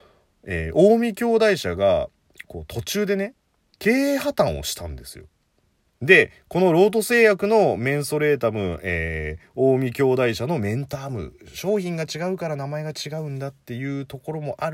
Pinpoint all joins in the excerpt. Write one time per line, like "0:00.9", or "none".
0:05.9

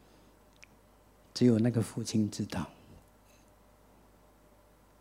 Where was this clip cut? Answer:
none

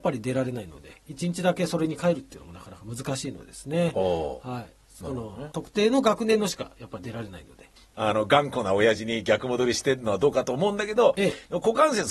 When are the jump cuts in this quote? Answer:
0:01.1
0:05.5
0:07.8

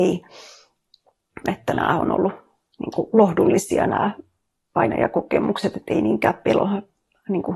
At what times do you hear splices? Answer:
0:01.4

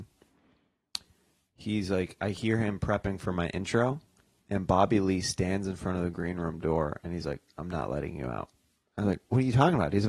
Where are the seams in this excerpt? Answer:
none

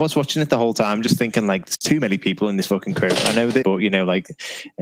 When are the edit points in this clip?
0:03.6

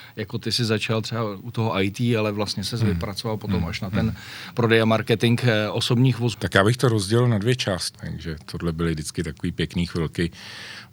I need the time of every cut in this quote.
0:06.3
0:07.9

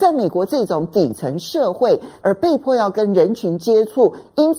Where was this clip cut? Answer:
0:02.2

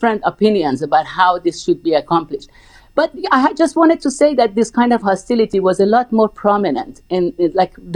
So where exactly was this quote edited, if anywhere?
none

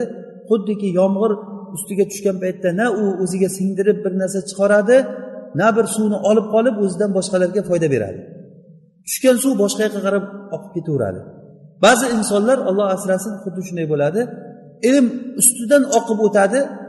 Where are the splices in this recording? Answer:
none

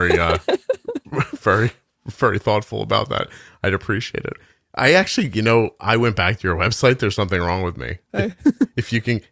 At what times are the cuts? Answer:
0:08.1

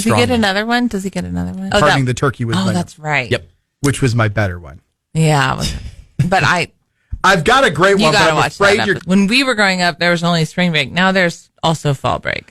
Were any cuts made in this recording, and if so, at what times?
0:01.7
0:09.0

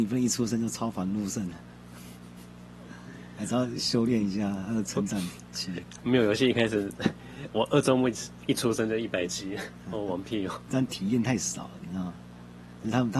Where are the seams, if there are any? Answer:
0:07.2

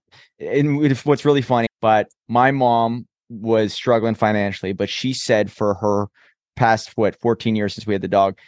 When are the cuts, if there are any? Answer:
0:01.7

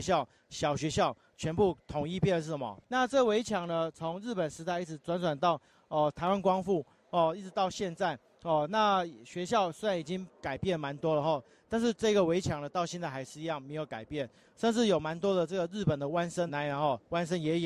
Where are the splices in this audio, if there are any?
0:02.8
0:16.5

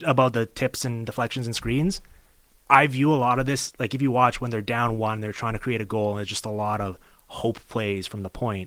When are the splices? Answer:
none

